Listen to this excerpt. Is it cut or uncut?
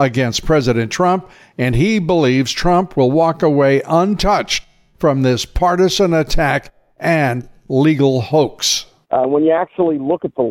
cut